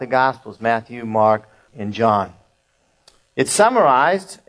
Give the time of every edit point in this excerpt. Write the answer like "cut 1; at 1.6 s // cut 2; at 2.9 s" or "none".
cut 1; at 1.7 s